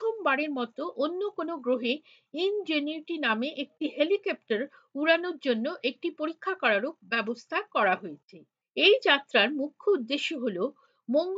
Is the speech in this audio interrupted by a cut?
no; 0 cuts

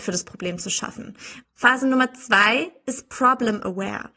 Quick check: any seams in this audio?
yes; 1 cut; at 1.4 s

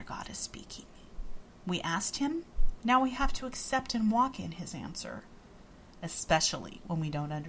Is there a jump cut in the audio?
no; 0 cuts

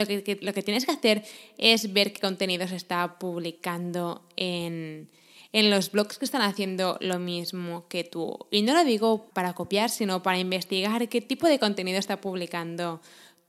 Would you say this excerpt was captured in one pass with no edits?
no; 1 cut; at 9.3 s

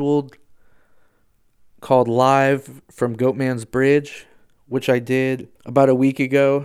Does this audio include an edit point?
yes; 1 cut; at 5.6 s

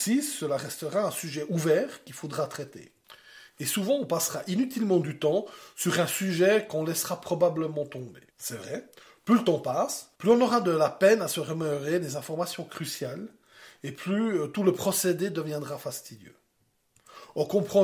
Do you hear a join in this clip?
yes; 2 cuts; at 8.3 s, 10.1 s

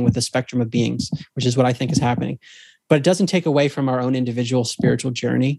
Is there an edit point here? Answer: no; 0 cuts

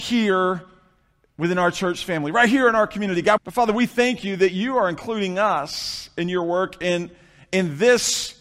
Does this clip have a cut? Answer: yes; 1 cut; at 3.4 s

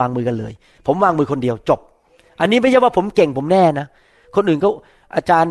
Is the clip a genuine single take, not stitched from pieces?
yes; 0 cuts

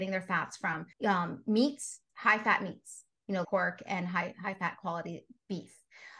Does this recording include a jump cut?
yes; 3 cuts; at 0.9 s, 2.1 s, 3.4 s

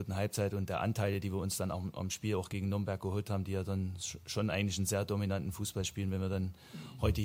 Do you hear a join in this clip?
no; 0 cuts

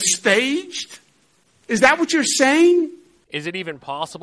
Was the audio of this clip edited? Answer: no; 0 cuts

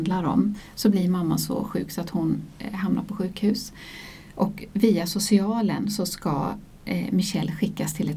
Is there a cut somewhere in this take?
no; 0 cuts

